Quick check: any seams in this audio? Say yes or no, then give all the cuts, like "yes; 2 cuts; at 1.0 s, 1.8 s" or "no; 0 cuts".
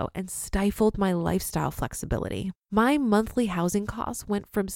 yes; 1 cut; at 2.6 s